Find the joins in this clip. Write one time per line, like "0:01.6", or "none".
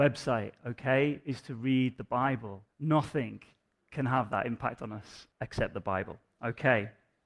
0:02.7
0:05.3